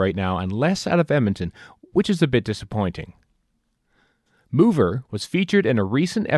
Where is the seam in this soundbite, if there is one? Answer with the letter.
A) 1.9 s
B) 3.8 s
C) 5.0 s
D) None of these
C